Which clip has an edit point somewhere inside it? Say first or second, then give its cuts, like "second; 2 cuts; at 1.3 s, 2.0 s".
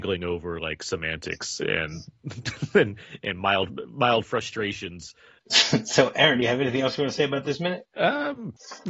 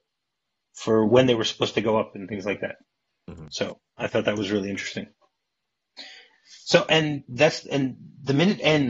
first; 1 cut; at 5.4 s